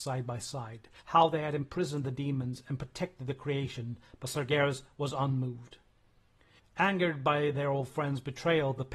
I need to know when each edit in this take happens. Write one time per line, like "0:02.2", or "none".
0:01.0
0:06.6